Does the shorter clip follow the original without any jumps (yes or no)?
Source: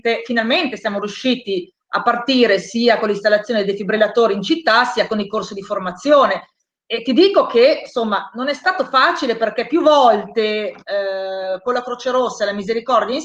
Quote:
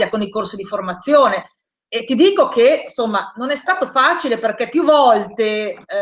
yes